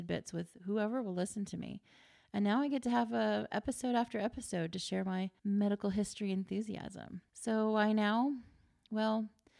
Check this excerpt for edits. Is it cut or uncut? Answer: cut